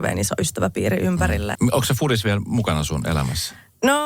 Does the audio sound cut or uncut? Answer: cut